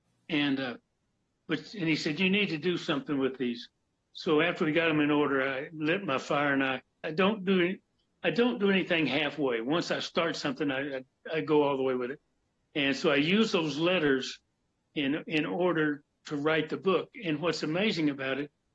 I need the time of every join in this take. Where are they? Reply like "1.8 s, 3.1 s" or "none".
7.0 s